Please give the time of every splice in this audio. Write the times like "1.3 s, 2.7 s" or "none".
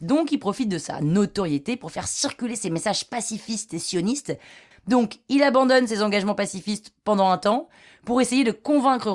4.7 s